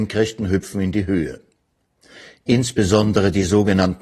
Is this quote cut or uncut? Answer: uncut